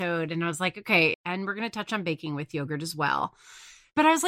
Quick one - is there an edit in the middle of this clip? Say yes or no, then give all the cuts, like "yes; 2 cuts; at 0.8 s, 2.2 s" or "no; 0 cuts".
yes; 1 cut; at 1.1 s